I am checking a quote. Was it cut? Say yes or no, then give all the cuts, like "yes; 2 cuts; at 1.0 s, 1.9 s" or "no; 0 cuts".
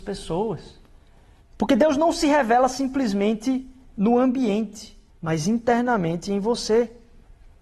yes; 2 cuts; at 1.4 s, 5.1 s